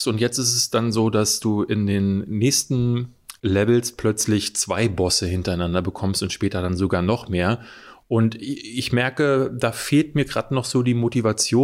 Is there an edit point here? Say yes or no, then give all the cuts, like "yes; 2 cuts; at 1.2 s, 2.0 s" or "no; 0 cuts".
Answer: no; 0 cuts